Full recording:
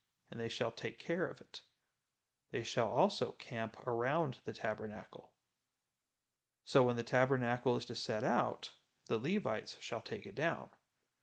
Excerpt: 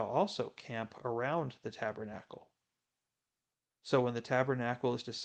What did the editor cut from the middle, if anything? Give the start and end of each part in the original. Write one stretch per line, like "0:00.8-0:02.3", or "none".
none